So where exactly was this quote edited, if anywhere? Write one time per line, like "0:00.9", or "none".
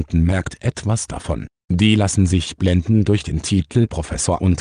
none